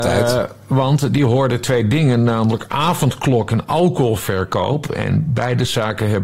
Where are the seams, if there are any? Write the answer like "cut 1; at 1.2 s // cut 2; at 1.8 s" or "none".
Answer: none